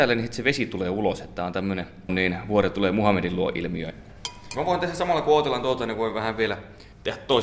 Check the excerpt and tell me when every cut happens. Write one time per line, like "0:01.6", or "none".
0:02.1